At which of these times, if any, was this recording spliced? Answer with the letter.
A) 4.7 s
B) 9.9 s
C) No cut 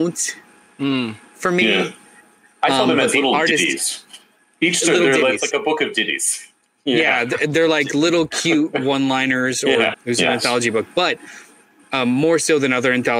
B